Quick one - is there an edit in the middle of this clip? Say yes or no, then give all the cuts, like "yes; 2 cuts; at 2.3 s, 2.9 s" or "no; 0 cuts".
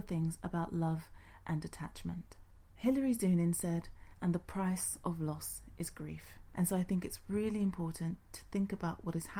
yes; 2 cuts; at 4.1 s, 6.5 s